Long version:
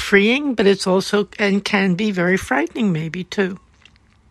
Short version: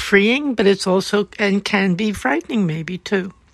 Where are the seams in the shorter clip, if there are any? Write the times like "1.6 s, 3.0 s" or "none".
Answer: 2.1 s